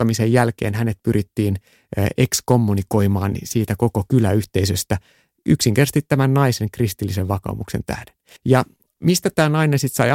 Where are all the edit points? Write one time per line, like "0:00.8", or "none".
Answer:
0:08.4